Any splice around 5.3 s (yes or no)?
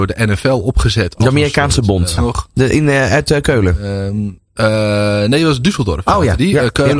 no